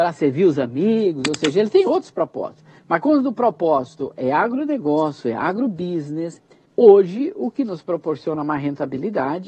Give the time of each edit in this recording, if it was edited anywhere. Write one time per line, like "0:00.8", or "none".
none